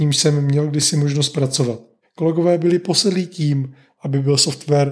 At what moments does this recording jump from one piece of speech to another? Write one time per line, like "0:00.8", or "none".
0:02.0